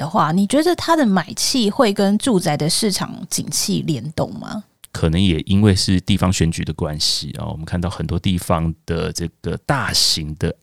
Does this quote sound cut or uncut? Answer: cut